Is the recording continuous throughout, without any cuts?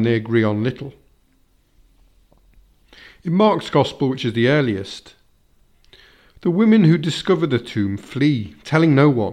yes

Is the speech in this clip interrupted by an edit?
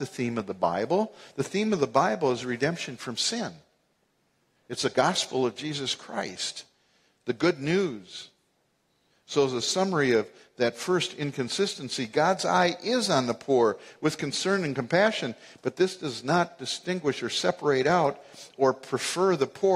no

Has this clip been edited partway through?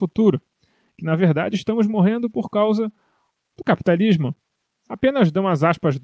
yes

